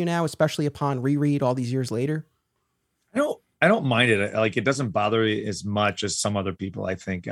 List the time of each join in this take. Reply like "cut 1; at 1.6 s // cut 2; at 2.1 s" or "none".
none